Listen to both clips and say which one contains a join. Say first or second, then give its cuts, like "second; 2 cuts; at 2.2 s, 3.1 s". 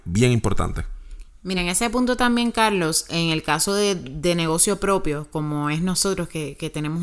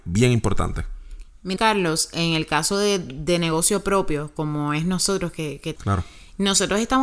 second; 2 cuts; at 1.6 s, 5.8 s